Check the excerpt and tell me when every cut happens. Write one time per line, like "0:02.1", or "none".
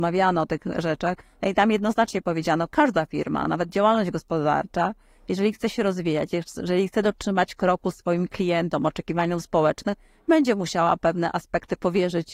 none

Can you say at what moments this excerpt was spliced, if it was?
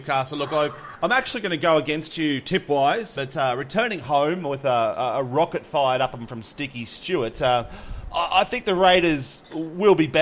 0:03.2

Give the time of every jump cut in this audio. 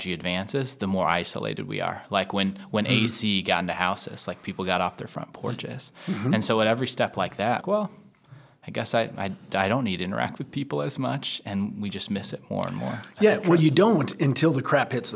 0:07.6

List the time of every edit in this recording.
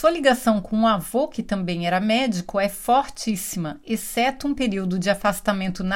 none

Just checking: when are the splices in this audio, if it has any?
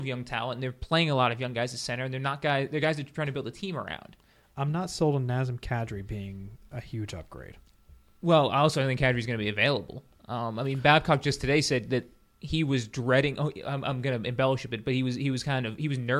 none

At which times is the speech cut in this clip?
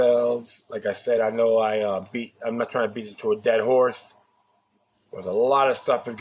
none

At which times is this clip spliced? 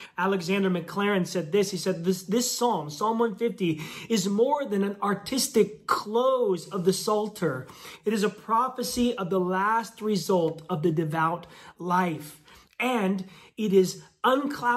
none

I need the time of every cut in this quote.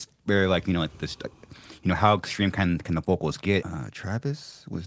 0:03.6

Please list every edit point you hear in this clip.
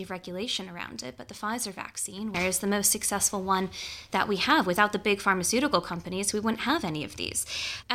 0:02.3
0:06.3

